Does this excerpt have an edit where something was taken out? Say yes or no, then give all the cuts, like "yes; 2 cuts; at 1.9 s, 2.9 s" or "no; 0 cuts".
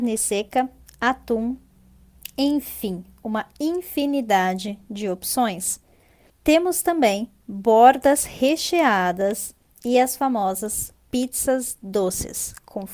no; 0 cuts